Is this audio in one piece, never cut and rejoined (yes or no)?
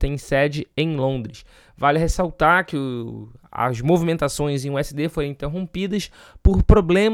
yes